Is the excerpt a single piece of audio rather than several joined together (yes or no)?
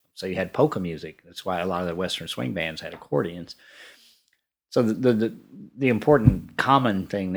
yes